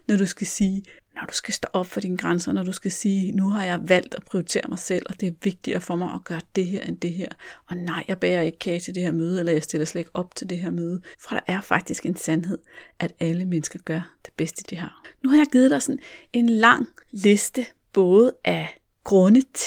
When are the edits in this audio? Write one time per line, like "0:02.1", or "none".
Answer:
0:11.1
0:14.6